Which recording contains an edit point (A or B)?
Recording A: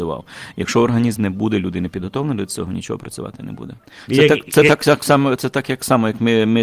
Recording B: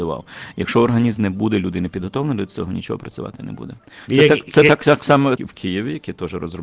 B